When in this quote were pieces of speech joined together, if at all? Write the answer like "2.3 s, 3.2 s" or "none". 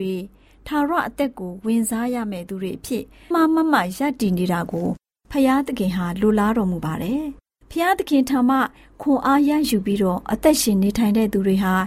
3.3 s